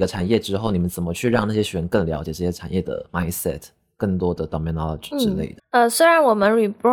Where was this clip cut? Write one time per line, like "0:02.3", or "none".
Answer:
0:05.6